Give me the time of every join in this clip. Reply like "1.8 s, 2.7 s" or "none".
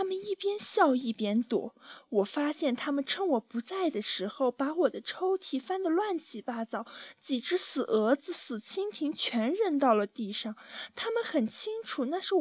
none